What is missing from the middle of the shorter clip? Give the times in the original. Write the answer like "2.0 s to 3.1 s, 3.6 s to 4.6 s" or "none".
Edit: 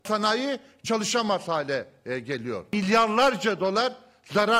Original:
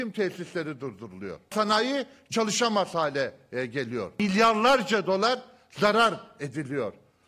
none